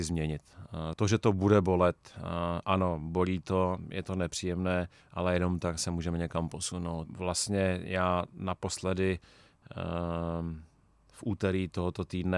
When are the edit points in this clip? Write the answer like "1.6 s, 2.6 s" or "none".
0.9 s, 7.1 s